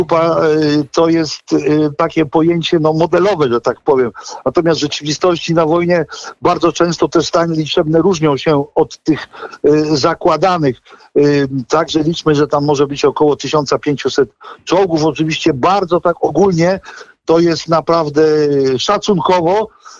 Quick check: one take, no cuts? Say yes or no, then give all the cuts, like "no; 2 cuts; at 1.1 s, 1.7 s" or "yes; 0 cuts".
yes; 0 cuts